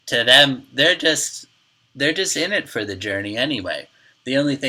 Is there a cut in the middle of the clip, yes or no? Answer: no